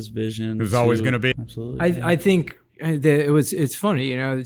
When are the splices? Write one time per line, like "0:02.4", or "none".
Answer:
0:01.3

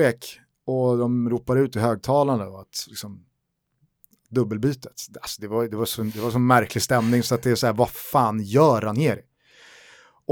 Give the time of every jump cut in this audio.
none

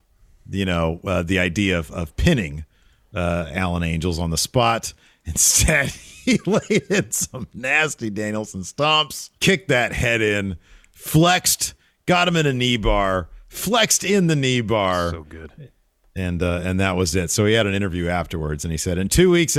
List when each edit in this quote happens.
0:09.3

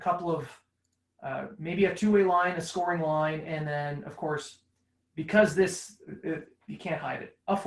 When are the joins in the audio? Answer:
none

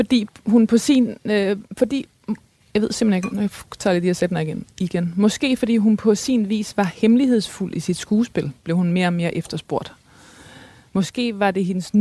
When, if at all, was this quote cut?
none

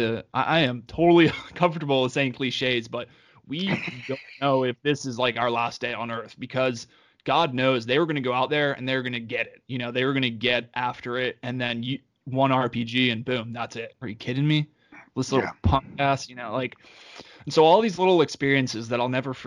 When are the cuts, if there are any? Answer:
0:14.0

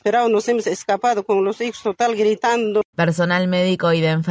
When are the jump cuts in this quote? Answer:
0:02.9

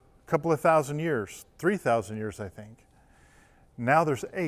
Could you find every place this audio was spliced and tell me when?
none

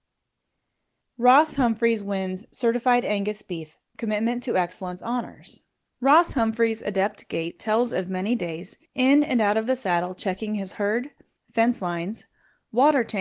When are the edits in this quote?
0:05.9
0:08.9

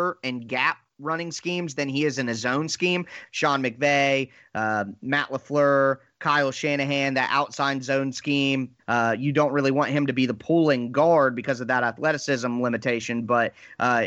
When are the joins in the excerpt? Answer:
0:03.3
0:08.8

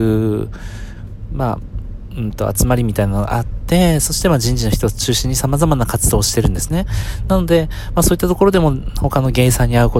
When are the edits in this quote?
none

